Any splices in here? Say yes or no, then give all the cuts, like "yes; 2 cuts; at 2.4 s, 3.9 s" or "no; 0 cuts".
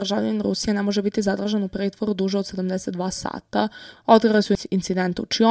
yes; 1 cut; at 4.0 s